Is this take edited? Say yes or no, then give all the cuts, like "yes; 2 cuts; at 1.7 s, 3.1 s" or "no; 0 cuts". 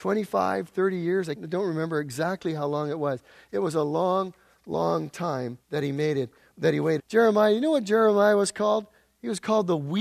yes; 3 cuts; at 1.4 s, 5.6 s, 7.0 s